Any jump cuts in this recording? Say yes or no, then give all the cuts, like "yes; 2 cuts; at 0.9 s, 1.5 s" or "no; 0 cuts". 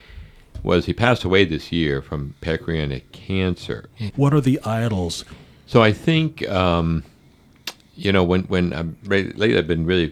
yes; 2 cuts; at 4.1 s, 5.3 s